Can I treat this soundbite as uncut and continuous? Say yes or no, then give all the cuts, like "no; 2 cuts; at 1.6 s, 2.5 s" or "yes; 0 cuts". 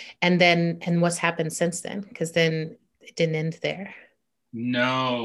yes; 0 cuts